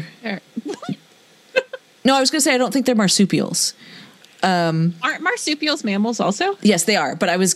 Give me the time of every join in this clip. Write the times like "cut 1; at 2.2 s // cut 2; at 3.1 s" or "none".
none